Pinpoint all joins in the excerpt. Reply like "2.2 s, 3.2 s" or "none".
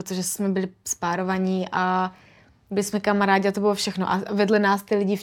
none

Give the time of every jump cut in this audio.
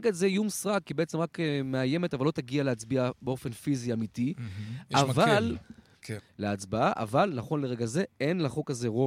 6.2 s

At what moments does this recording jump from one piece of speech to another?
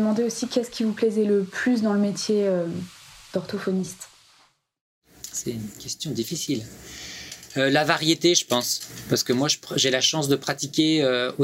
5.3 s

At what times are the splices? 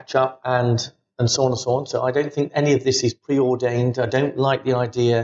none

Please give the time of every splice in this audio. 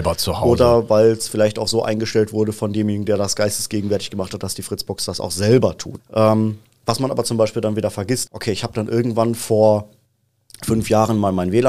6.0 s, 8.3 s

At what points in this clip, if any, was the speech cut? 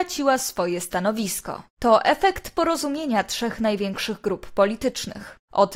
1.7 s

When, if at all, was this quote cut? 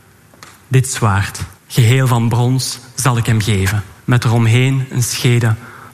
1.6 s, 4.0 s

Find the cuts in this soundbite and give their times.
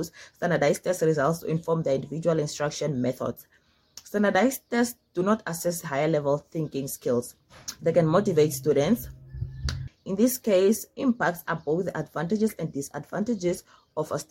7.8 s, 9.9 s

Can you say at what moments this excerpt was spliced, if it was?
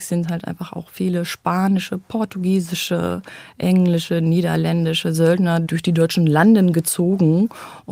none

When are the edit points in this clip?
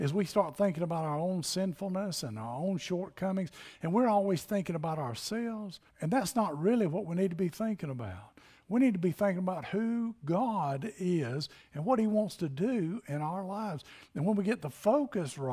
5.9 s

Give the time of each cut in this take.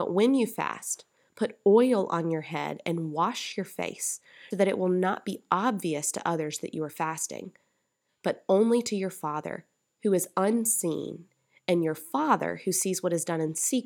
4.5 s

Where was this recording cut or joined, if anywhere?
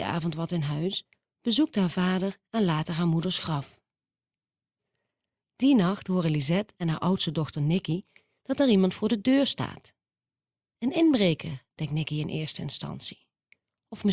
none

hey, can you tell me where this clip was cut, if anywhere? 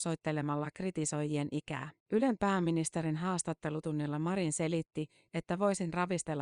2.0 s, 5.3 s

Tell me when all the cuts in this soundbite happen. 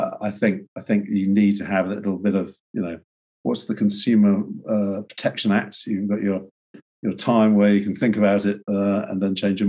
none

